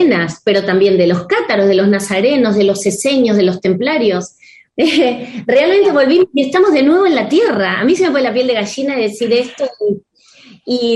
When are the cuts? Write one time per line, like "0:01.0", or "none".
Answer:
0:04.7